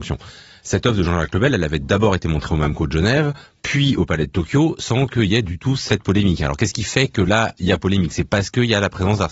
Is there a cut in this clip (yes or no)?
no